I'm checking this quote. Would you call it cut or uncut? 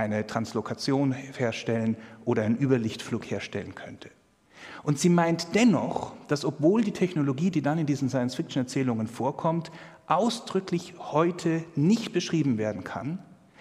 uncut